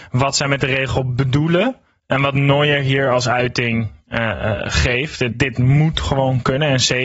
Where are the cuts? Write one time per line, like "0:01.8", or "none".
0:05.3